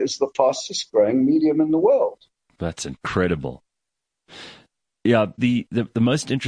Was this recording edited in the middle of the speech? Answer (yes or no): yes